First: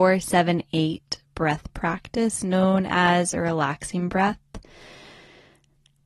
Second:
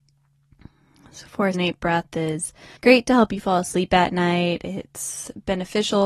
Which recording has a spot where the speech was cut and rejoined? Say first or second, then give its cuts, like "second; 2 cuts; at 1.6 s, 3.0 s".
second; 2 cuts; at 1.5 s, 2.8 s